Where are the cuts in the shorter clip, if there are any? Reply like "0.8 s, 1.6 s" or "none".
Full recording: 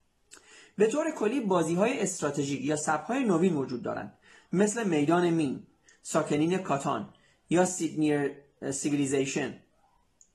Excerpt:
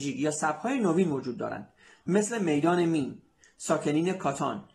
none